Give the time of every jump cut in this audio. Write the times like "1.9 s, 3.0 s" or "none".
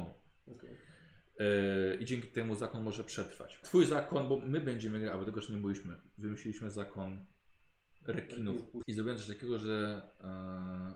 3.6 s, 8.8 s